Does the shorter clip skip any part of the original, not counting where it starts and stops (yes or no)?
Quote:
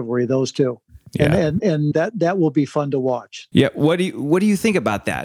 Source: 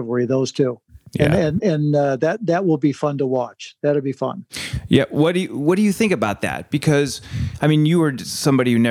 yes